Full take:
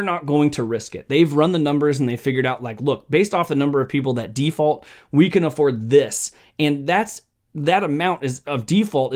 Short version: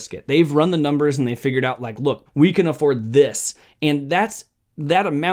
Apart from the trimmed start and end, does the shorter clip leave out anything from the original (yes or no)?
yes